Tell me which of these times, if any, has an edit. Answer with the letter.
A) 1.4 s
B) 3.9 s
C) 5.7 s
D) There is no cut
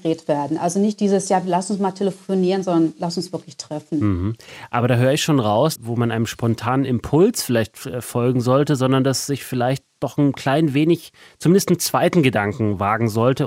C